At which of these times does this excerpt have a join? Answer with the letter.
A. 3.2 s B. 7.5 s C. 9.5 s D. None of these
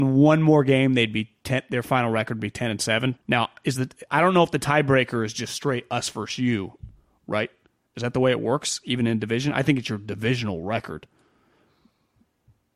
A